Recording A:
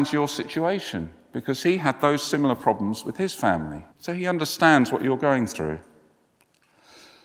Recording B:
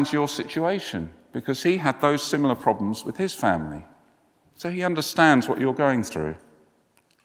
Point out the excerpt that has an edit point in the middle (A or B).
A